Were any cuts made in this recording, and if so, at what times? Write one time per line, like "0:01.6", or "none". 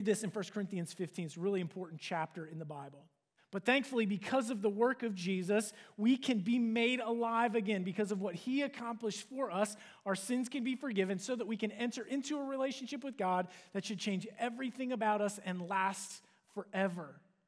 0:03.4